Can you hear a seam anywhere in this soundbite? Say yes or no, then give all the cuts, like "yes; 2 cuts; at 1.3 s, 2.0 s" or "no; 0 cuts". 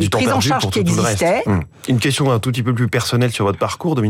yes; 1 cut; at 1.5 s